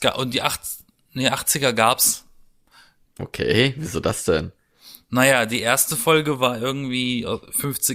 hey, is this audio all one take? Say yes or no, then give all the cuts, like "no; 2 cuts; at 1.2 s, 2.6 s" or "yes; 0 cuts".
no; 1 cut; at 3.0 s